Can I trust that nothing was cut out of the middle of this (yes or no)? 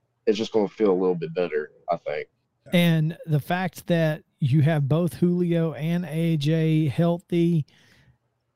no